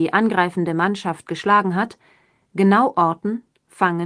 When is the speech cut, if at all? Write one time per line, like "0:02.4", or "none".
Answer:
none